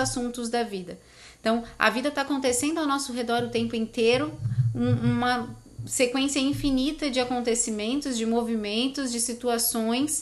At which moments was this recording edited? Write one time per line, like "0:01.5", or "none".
none